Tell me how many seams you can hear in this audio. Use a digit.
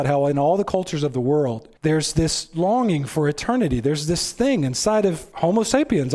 1